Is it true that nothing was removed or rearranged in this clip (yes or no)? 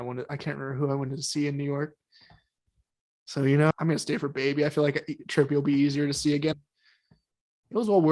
no